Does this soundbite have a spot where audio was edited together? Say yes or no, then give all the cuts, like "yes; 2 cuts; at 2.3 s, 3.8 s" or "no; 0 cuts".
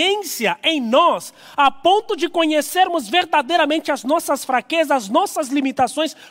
no; 0 cuts